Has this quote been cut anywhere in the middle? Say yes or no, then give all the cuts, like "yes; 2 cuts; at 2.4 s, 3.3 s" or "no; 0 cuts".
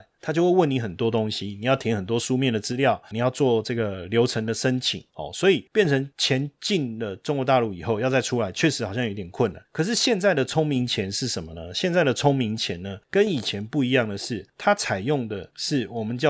no; 0 cuts